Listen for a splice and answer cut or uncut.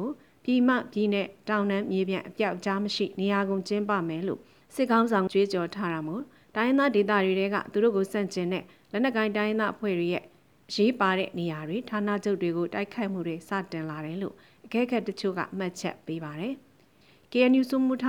cut